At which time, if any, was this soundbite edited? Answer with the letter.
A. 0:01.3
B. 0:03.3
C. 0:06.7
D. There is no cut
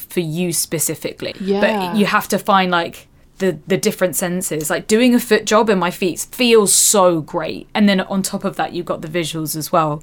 A